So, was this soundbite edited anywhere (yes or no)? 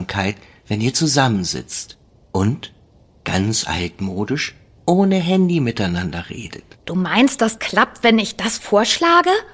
yes